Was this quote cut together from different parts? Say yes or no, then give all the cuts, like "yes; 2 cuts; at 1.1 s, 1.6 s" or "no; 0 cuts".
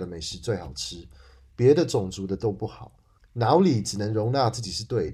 yes; 1 cut; at 3.2 s